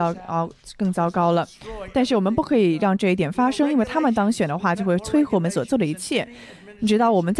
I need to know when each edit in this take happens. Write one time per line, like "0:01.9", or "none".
none